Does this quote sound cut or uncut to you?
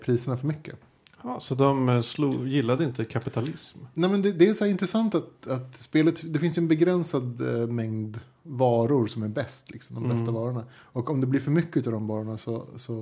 uncut